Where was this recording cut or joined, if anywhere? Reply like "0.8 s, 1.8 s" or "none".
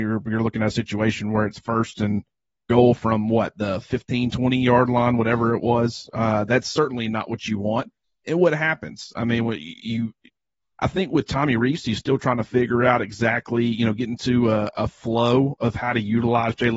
none